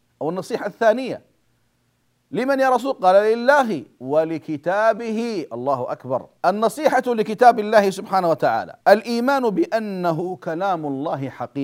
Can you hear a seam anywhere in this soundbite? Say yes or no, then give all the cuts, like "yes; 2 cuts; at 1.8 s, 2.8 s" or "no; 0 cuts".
yes; 2 cuts; at 6.4 s, 8.8 s